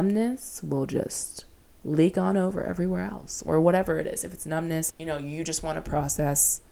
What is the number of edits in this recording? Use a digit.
1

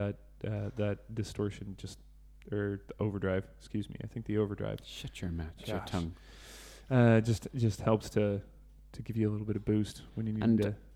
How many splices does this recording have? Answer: 1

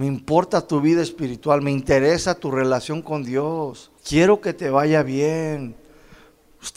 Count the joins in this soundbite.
1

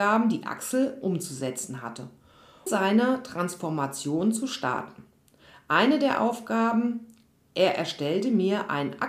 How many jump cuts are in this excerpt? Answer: 1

